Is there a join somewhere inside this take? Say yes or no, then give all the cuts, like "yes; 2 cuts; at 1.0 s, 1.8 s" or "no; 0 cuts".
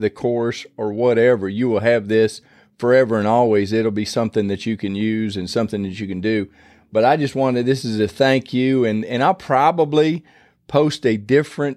no; 0 cuts